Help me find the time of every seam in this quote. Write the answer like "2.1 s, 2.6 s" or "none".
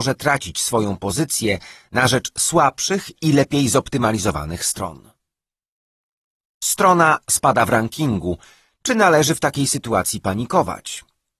none